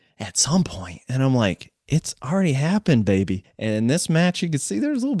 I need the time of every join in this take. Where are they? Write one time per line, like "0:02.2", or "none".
0:03.4